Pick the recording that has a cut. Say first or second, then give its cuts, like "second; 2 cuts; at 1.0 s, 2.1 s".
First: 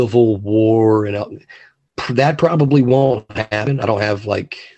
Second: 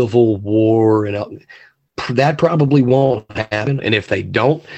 second; 1 cut; at 3.8 s